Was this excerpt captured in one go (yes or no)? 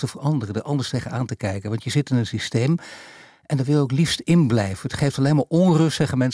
yes